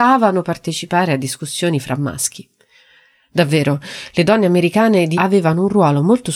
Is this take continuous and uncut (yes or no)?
no